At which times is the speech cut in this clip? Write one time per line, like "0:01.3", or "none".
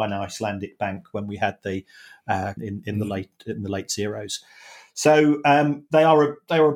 0:02.6